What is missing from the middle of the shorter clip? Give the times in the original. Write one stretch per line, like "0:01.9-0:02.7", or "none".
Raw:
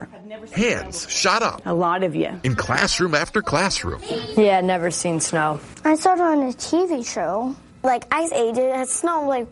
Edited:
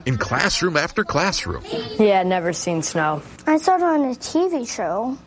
none